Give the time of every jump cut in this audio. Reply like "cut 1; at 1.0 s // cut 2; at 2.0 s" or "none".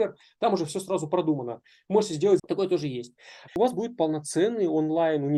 cut 1; at 2.4 s // cut 2; at 3.5 s